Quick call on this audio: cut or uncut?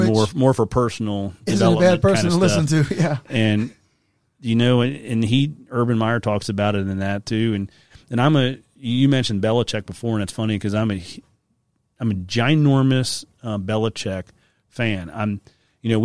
uncut